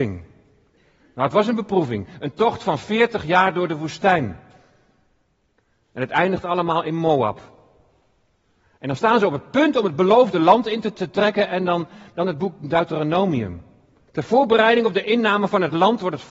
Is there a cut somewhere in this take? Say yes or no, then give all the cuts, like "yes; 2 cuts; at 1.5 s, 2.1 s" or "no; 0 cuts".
yes; 2 cuts; at 10.9 s, 14.1 s